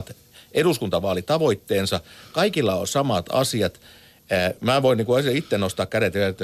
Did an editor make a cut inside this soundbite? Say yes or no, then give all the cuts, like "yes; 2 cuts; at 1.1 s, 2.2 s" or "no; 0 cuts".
no; 0 cuts